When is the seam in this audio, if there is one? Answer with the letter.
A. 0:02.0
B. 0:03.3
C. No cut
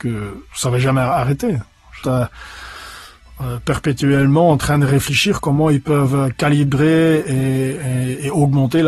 A